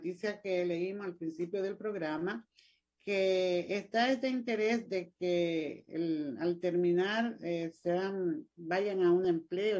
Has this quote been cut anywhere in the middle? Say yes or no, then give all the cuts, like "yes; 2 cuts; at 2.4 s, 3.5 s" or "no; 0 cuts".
no; 0 cuts